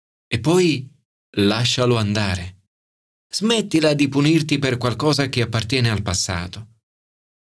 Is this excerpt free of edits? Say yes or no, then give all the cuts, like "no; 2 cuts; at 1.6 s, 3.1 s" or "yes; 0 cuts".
yes; 0 cuts